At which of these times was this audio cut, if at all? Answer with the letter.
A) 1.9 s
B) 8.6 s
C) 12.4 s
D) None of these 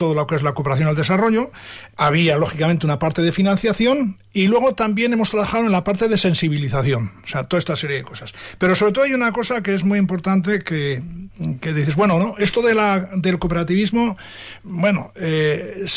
A